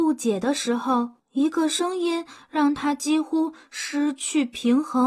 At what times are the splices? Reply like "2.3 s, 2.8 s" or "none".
1.2 s